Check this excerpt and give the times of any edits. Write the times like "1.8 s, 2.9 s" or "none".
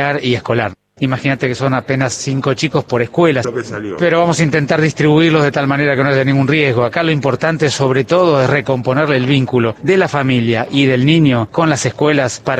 1.0 s, 3.4 s